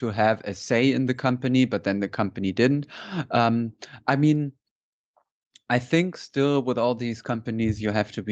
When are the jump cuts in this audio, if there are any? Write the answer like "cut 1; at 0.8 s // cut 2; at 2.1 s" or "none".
none